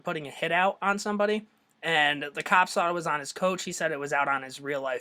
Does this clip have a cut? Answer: no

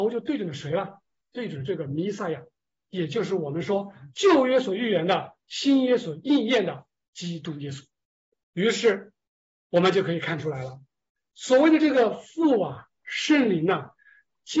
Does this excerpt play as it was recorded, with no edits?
no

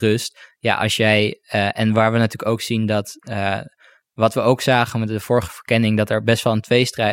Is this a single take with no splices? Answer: yes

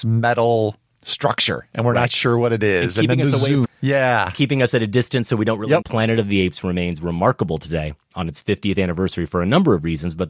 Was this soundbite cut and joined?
yes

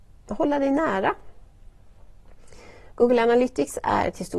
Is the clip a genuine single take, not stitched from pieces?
no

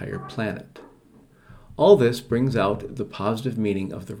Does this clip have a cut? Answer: no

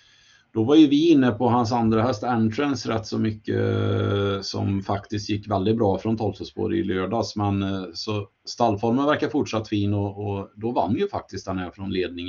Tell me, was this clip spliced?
no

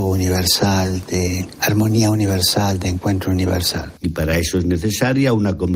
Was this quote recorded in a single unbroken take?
no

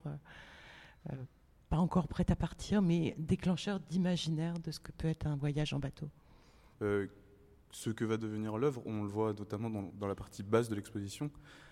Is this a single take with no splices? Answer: no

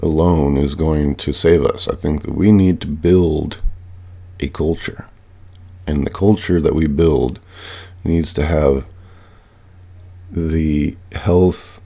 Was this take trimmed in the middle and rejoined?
no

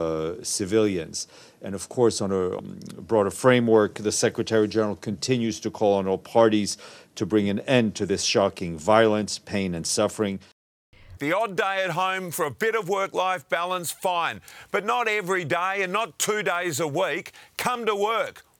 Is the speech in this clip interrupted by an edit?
yes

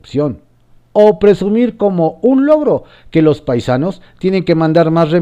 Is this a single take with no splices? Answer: yes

